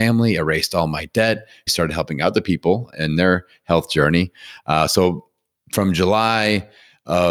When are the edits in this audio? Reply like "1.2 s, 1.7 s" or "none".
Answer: 1.7 s